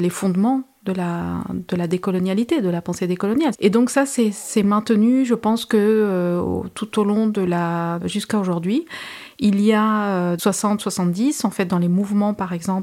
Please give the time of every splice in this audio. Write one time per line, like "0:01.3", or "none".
0:03.5
0:08.0
0:10.4